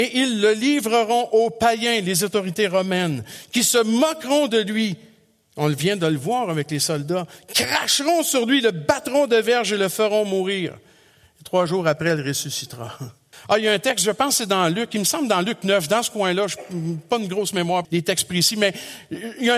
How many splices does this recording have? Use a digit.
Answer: 2